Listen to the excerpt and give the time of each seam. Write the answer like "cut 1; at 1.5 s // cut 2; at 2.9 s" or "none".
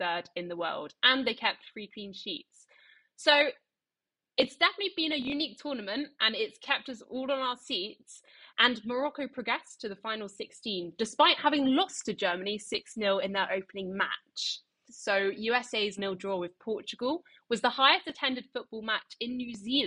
cut 1; at 8.5 s // cut 2; at 14.9 s // cut 3; at 16.0 s